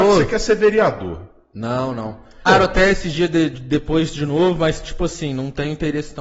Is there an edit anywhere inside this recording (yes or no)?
yes